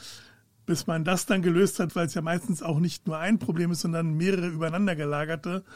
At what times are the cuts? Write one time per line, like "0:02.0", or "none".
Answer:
0:01.9